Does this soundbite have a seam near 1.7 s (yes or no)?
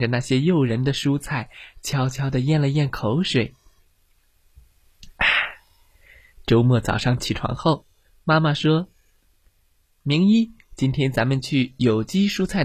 no